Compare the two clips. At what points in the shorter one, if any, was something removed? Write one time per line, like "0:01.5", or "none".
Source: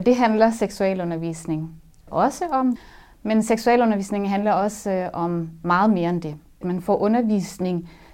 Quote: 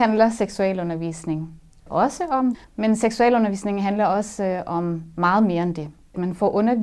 0:02.6